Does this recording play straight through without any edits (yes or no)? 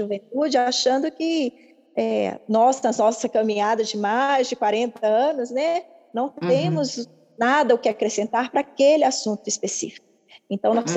yes